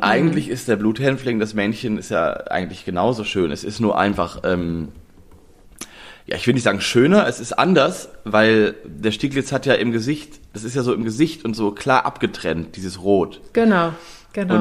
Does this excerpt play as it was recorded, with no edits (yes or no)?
yes